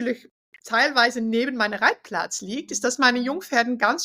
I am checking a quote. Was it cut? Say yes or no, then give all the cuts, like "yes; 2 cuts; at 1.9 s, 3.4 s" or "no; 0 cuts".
no; 0 cuts